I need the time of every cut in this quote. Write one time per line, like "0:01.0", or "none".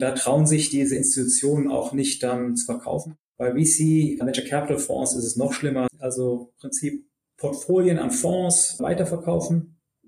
0:04.2
0:05.9

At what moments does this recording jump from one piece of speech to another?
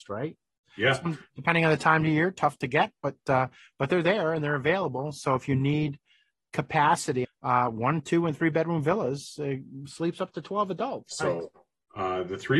0:07.2
0:11.1

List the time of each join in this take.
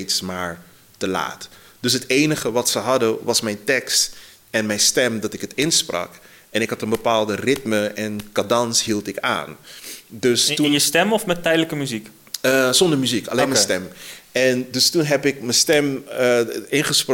none

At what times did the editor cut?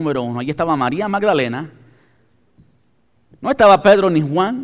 none

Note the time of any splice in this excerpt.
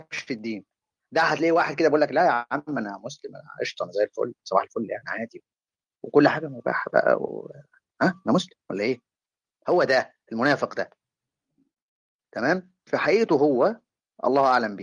0:12.9

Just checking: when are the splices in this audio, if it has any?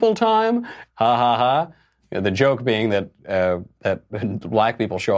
0:00.9

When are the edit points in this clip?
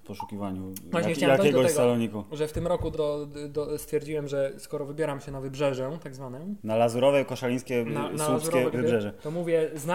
0:02.9
0:06.6
0:08.7

